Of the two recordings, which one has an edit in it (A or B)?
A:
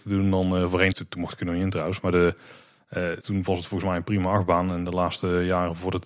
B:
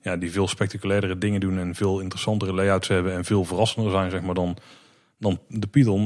A